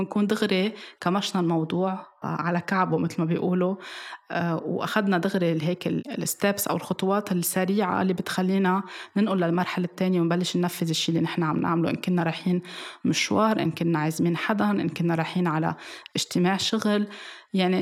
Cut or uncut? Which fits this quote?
cut